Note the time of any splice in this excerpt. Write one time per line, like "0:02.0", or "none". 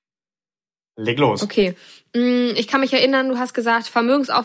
none